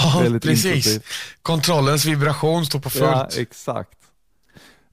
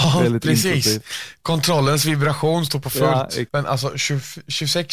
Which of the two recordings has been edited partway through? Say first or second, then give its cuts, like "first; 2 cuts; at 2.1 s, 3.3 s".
second; 1 cut; at 3.5 s